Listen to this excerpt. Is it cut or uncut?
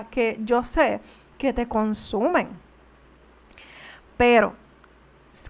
uncut